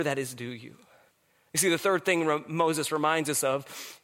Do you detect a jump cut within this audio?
no; 0 cuts

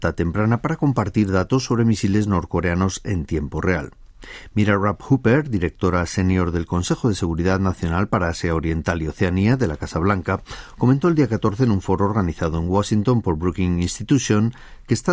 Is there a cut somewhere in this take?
no; 0 cuts

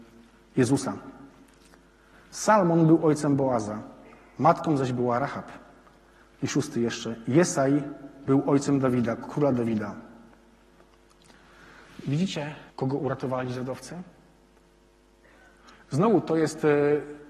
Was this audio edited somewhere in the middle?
yes; 2 cuts; at 6.2 s, 12.7 s

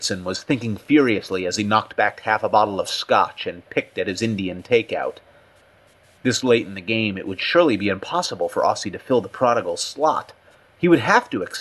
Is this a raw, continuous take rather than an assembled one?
yes; 0 cuts

